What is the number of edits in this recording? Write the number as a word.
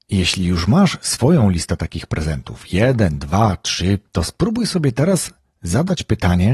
one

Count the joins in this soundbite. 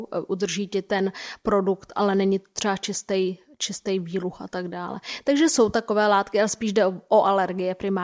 zero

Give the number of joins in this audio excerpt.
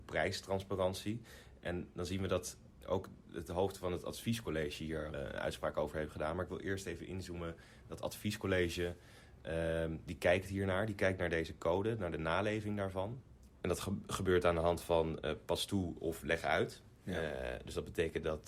one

